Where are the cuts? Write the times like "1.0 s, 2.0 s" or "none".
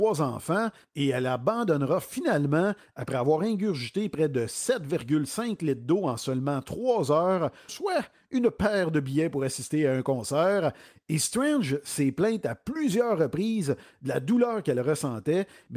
7.7 s